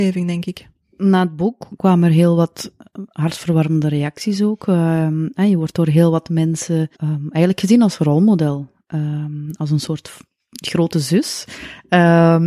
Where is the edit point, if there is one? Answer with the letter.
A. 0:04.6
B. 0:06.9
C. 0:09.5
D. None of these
B